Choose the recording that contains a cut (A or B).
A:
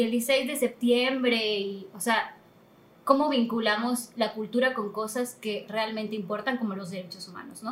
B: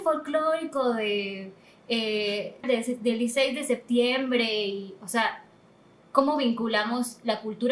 B